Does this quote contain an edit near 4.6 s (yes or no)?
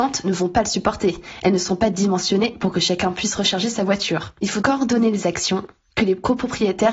yes